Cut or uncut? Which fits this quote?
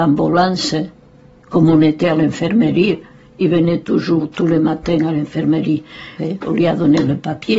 cut